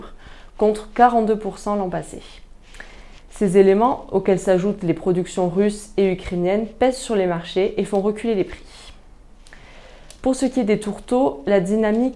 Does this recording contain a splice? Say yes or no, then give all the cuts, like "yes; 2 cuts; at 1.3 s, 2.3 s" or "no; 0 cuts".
no; 0 cuts